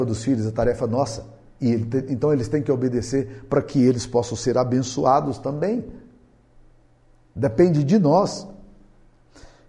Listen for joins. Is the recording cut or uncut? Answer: uncut